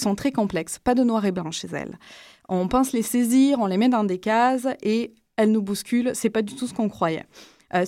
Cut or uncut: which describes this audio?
uncut